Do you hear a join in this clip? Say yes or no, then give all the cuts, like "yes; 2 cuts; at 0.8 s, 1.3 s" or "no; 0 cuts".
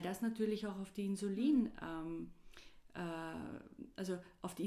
no; 0 cuts